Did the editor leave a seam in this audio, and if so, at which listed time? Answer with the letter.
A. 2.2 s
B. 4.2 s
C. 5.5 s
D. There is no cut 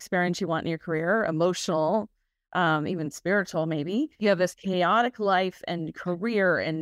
B